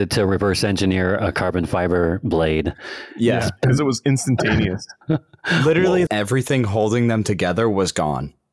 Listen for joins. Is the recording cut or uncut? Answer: cut